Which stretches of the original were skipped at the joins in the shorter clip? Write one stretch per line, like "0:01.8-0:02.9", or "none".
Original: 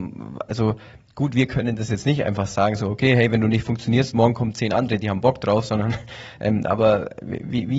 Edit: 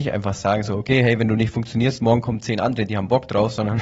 none